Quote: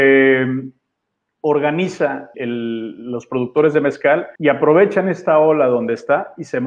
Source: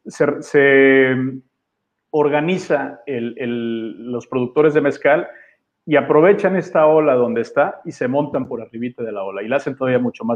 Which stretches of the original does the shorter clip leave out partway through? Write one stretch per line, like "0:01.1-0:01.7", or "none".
0:03.0-0:03.3
0:05.4-0:05.8